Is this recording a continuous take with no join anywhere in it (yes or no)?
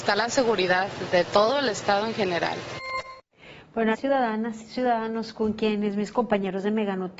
no